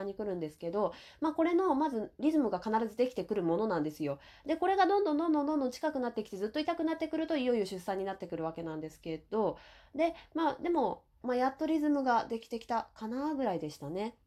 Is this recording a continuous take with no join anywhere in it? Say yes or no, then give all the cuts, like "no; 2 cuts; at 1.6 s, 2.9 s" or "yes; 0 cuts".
no; 1 cut; at 11.2 s